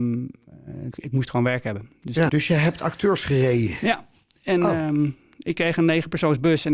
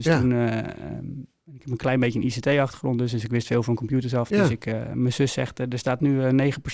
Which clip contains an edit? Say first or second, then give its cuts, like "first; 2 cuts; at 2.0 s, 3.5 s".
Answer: first; 2 cuts; at 0.9 s, 2.3 s